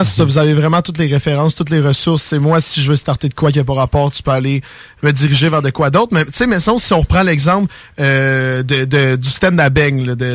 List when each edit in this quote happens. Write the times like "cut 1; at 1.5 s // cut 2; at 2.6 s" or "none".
none

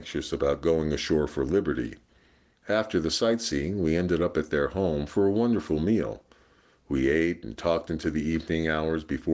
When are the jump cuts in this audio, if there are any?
cut 1; at 2.5 s

